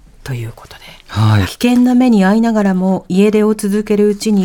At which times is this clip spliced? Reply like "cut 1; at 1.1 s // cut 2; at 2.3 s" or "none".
cut 1; at 1.4 s